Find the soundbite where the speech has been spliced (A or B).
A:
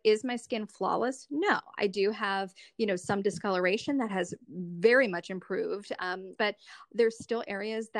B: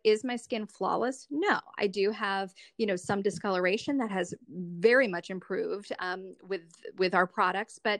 A